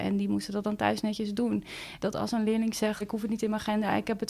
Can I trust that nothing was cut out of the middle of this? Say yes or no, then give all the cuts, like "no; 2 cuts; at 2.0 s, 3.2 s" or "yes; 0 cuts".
no; 2 cuts; at 2.0 s, 3.0 s